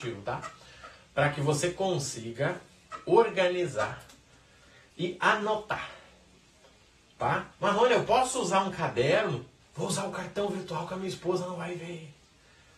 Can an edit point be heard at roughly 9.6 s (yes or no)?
yes